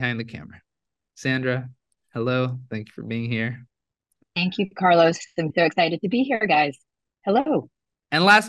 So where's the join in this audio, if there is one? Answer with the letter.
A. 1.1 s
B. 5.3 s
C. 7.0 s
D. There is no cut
D